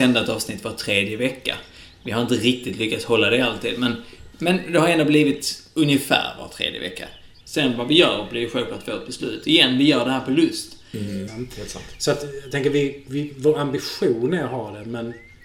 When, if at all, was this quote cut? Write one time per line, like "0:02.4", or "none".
0:07.4
0:11.3